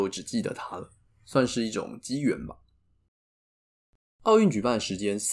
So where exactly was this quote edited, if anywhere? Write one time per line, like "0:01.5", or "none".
none

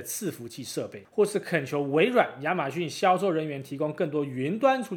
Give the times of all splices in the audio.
0:01.1

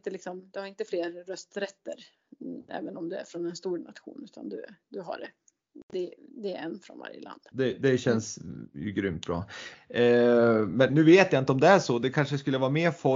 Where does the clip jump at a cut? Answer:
0:07.5
0:09.7
0:10.9

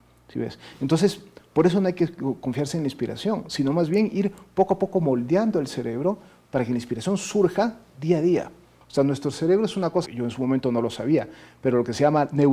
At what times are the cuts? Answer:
0:08.8
0:10.1

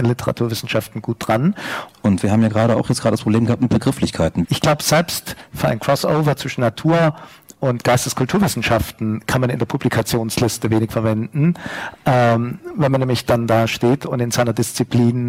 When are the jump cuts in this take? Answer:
0:01.9
0:04.4

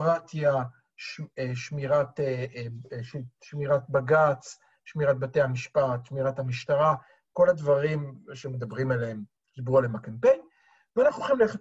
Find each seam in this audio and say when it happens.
none

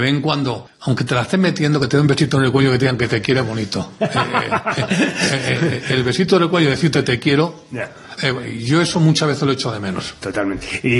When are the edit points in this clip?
none

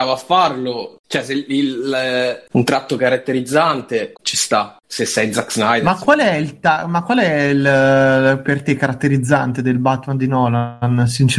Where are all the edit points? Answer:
0:02.5
0:04.1

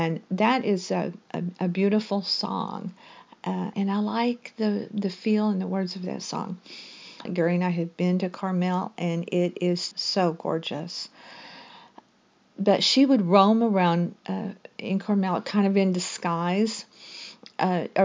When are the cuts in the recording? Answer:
0:03.7
0:07.3
0:09.9

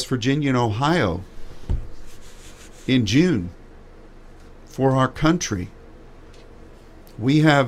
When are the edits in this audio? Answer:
none

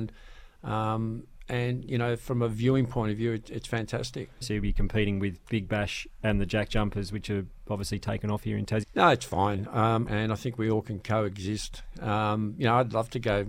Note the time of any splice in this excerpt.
0:04.4
0:08.8
0:10.1

